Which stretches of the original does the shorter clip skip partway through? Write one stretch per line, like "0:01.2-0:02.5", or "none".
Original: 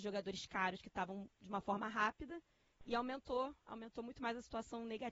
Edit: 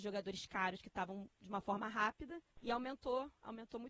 0:02.5-0:02.7